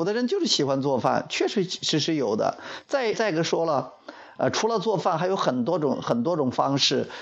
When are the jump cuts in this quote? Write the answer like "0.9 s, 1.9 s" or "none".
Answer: 3.1 s